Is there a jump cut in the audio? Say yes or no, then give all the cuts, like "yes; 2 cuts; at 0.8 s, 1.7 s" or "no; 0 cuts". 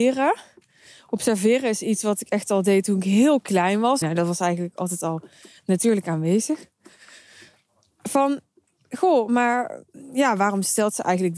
yes; 1 cut; at 4.0 s